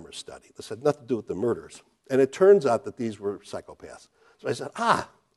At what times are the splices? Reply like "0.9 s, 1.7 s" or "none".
2.0 s